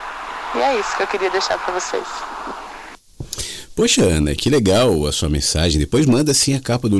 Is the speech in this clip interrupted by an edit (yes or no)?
no